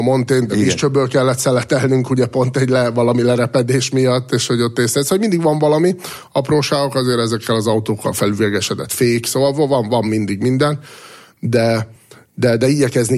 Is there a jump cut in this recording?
no; 0 cuts

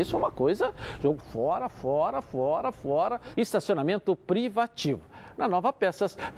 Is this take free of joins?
no; 2 cuts; at 1.2 s, 3.3 s

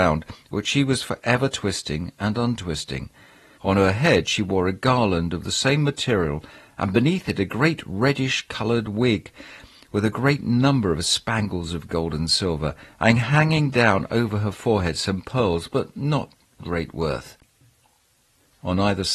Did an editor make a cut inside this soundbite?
yes; 1 cut; at 3.6 s

